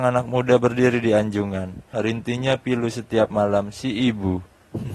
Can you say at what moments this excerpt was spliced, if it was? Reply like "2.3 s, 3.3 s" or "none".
1.9 s